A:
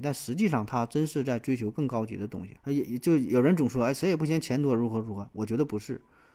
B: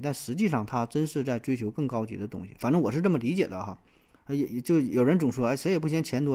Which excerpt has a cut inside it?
A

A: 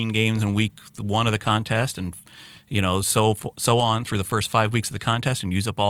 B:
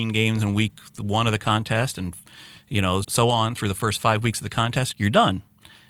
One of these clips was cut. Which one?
B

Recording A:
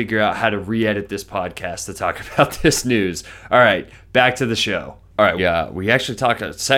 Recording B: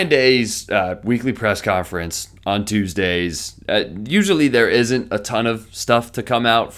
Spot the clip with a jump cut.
A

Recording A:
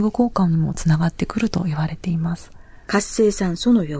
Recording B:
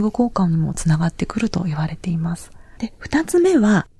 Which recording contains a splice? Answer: B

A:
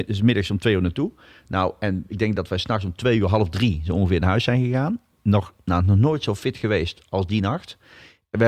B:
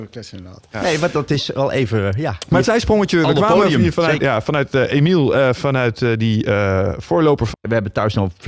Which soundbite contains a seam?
B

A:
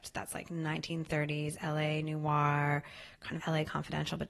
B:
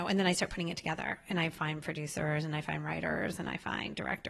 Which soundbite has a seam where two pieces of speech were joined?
A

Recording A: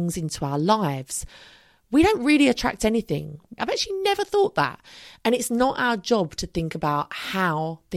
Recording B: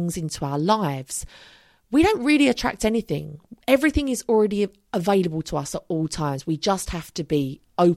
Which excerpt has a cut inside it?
A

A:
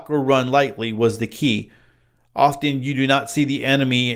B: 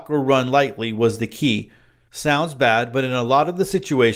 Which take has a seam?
B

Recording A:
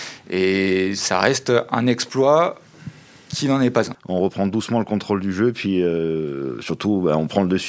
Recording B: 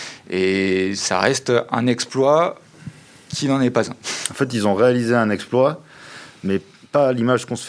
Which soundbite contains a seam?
A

